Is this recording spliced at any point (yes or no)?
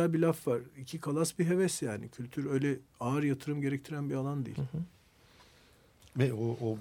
no